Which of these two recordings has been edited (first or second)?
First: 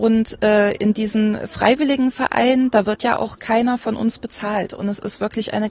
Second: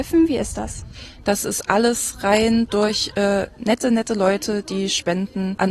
second